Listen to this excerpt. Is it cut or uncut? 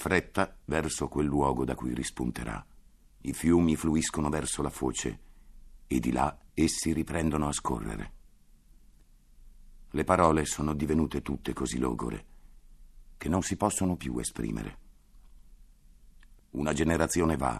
cut